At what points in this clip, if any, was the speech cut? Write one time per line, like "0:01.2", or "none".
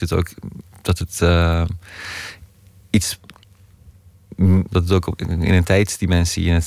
0:04.7